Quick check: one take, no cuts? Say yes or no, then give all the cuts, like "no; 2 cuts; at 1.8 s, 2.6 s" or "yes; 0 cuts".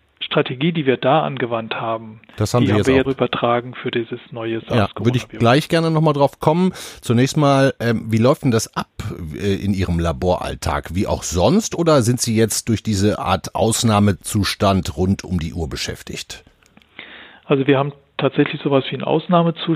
no; 1 cut; at 3.0 s